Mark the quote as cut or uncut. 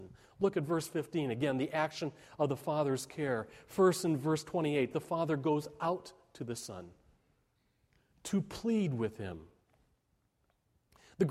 uncut